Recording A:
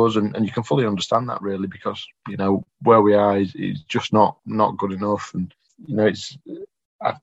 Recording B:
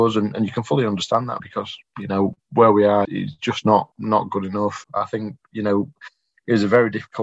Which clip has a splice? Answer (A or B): B